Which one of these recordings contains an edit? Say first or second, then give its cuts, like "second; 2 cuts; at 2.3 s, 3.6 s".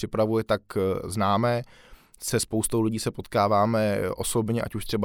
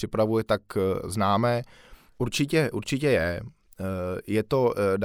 second; 1 cut; at 2.1 s